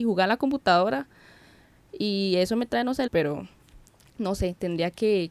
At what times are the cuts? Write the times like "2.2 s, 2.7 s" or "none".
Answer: 3.1 s